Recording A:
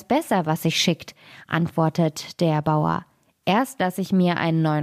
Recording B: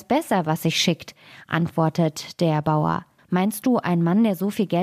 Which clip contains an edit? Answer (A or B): B